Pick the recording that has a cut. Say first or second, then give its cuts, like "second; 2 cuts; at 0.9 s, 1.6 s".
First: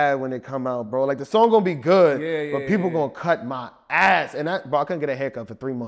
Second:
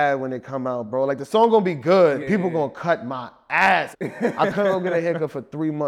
second; 2 cuts; at 2.2 s, 3.9 s